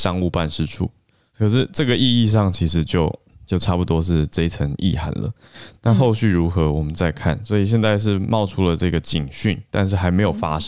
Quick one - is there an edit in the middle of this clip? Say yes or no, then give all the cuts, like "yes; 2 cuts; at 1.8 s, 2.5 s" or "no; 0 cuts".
no; 0 cuts